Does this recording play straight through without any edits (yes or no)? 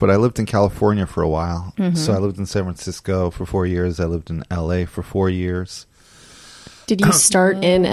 yes